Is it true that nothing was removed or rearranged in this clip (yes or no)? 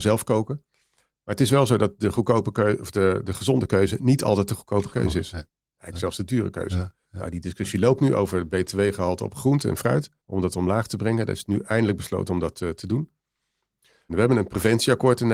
no